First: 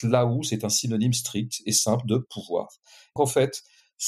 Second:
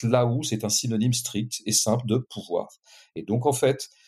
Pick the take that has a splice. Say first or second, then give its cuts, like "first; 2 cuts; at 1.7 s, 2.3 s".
first; 1 cut; at 3.2 s